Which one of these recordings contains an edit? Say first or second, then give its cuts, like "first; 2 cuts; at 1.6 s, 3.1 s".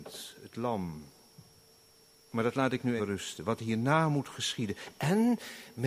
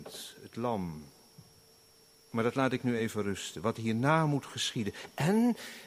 first; 1 cut; at 3.0 s